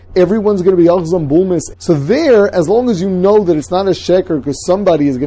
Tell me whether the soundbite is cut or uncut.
cut